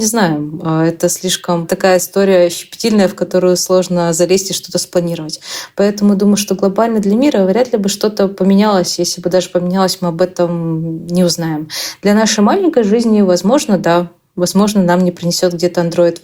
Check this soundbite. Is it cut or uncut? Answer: uncut